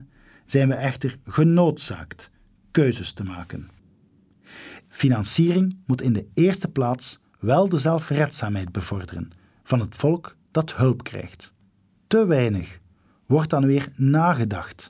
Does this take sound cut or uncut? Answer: cut